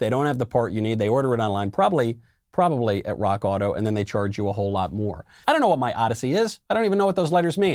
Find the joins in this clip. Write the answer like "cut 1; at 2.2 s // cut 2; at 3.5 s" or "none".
cut 1; at 5.4 s